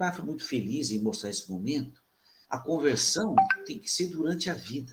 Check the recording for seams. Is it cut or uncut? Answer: cut